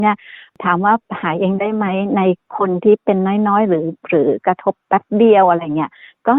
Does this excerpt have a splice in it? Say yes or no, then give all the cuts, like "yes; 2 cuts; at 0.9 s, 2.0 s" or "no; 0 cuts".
no; 0 cuts